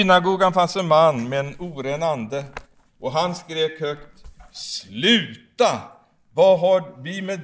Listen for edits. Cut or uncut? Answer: uncut